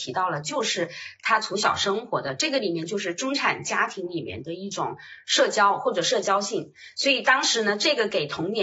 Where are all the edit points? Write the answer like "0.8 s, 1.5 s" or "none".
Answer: none